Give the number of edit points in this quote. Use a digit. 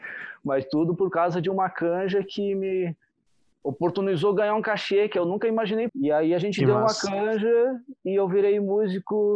1